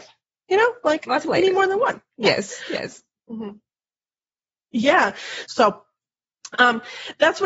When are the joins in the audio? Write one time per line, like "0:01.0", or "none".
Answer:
0:03.2
0:05.5